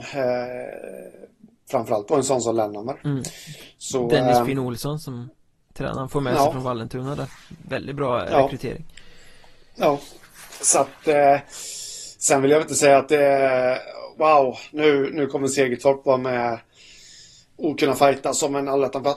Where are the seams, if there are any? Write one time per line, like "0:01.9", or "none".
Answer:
none